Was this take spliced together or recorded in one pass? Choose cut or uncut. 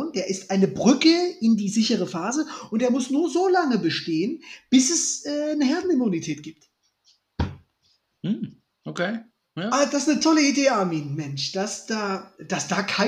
uncut